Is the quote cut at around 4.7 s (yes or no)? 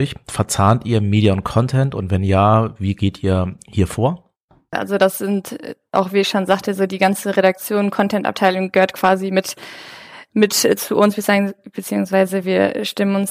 yes